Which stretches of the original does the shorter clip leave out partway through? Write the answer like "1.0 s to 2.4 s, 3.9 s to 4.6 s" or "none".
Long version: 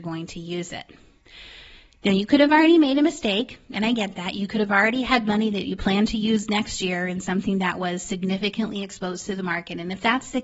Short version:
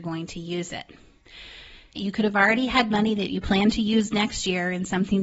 2.0 s to 4.3 s

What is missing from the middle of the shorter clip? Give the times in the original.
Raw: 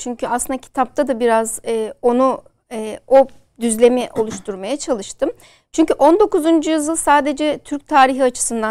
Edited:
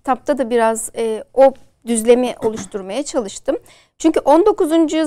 2.0 s to 3.0 s

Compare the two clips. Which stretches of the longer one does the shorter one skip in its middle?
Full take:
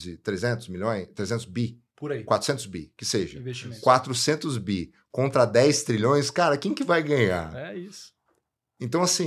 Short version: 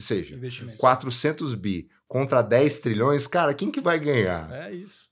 none

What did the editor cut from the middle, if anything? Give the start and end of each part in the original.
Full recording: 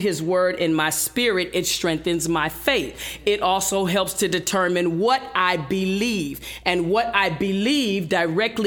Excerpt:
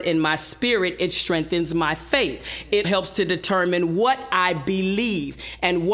3.4 s to 3.9 s

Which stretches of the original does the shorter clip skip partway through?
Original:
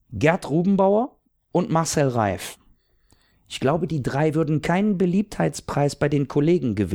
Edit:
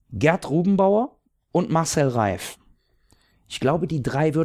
none

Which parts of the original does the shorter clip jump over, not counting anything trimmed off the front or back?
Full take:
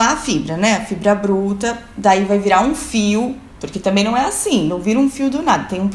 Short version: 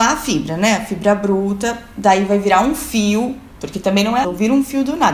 4.2 s to 4.7 s

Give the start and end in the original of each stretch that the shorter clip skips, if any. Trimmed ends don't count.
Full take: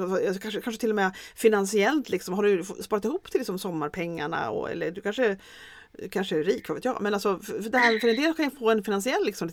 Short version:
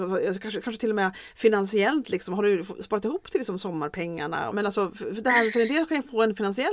4.5 s to 7.0 s

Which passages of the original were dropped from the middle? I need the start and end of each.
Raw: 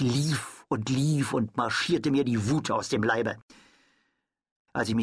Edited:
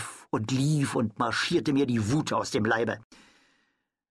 none

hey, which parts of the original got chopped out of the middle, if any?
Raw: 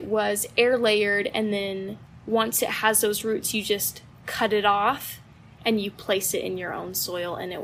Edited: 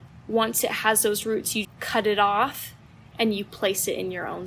3.6 s to 4.1 s

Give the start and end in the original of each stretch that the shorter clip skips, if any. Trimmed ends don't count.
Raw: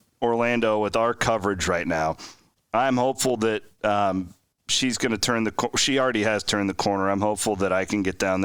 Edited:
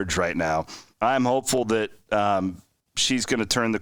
2.4 s to 2.6 s

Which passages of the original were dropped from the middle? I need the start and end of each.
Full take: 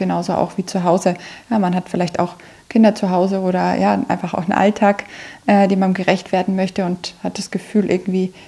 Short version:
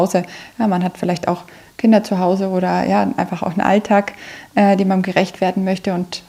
none

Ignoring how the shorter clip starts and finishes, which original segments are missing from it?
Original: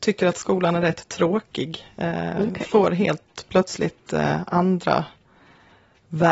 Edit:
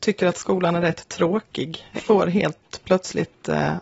1.9 s to 2.6 s

